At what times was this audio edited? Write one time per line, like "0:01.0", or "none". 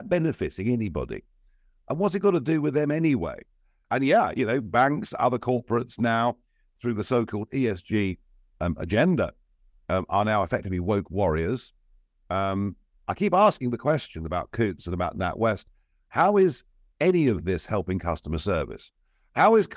0:03.8